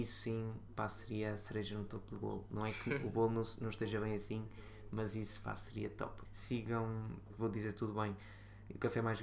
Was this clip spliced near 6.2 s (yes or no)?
yes